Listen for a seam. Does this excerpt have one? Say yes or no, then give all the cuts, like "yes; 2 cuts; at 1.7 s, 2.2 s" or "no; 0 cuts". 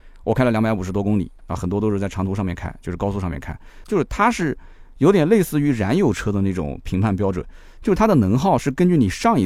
yes; 1 cut; at 3.8 s